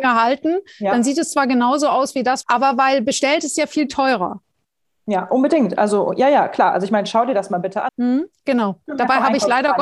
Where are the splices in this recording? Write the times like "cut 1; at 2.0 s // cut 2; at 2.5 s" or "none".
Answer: cut 1; at 2.4 s // cut 2; at 7.9 s